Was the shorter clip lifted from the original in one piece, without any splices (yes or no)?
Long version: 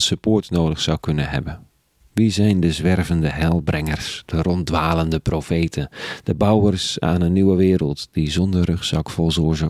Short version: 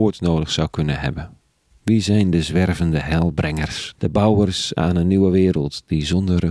no